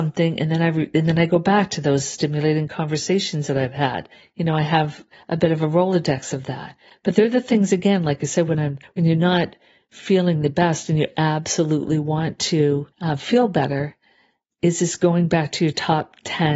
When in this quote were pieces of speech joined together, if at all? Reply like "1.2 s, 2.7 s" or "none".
12.9 s